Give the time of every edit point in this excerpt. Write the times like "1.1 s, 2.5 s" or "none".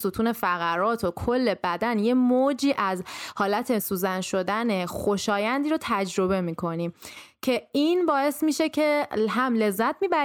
3.8 s